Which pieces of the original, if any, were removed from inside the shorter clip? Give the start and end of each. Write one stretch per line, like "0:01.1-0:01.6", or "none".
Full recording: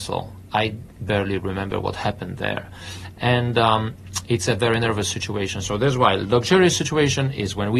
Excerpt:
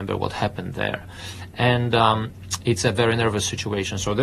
none